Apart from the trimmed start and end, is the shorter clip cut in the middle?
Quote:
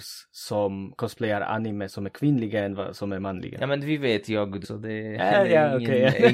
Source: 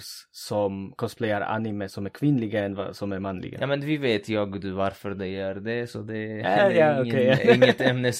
yes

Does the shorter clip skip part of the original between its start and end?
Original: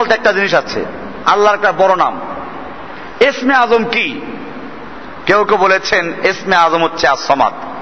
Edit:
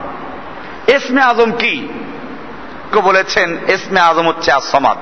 yes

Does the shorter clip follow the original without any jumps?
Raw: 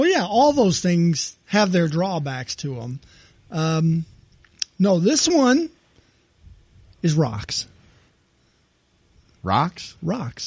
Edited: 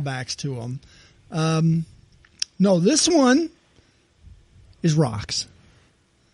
yes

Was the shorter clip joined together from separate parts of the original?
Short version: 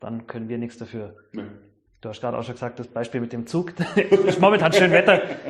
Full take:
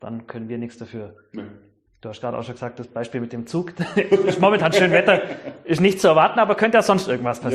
no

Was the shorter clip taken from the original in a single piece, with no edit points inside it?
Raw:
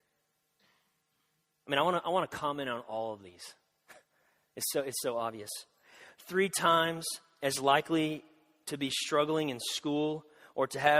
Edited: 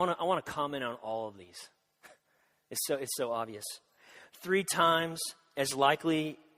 yes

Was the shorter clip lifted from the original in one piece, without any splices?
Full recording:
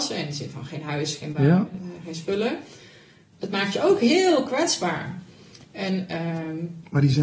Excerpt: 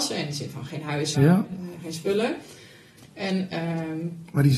no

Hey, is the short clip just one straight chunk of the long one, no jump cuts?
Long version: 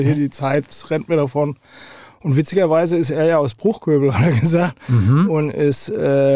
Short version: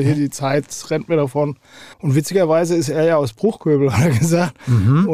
no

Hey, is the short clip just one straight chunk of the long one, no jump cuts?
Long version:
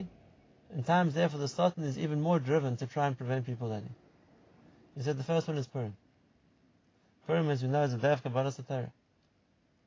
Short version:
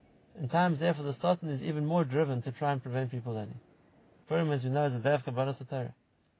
no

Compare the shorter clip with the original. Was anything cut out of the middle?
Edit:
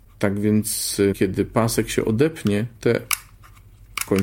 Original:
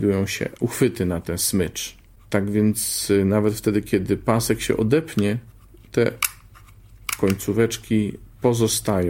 yes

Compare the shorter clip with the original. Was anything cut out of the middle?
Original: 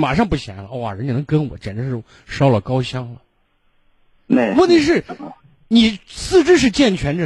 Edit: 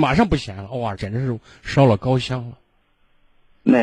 yes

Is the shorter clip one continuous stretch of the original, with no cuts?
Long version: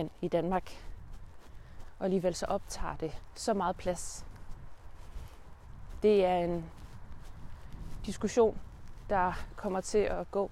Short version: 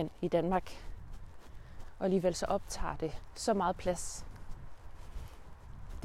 yes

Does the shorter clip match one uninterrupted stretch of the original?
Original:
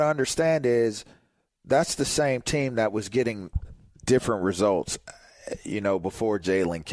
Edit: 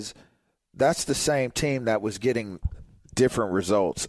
yes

